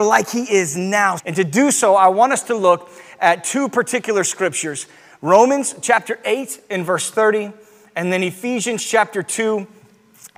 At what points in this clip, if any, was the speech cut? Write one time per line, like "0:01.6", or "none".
0:01.2